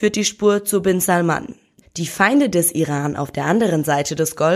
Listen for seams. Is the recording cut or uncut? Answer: cut